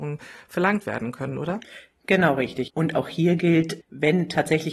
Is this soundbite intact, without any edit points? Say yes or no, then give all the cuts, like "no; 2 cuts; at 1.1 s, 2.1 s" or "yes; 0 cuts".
no; 2 cuts; at 2.7 s, 3.8 s